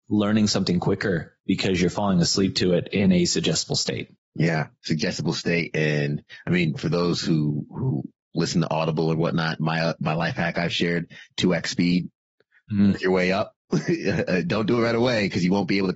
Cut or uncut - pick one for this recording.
uncut